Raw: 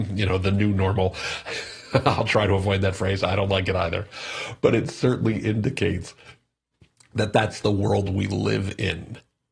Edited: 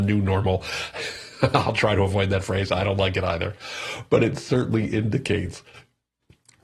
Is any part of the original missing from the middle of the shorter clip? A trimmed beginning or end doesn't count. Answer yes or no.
no